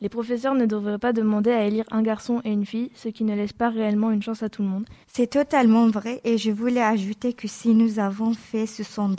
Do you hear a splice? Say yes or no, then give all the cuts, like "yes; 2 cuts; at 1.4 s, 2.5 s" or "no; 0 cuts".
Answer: yes; 1 cut; at 5.0 s